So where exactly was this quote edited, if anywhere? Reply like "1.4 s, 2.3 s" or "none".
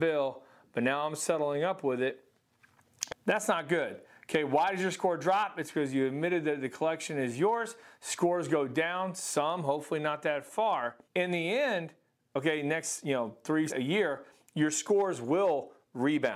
3.1 s, 11.1 s, 13.7 s